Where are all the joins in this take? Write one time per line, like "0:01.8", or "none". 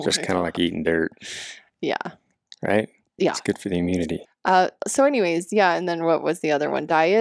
0:04.3